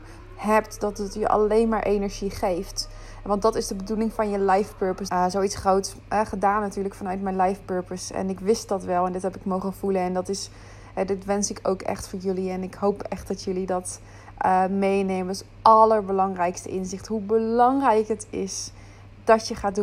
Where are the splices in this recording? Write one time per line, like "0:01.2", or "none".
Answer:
0:05.1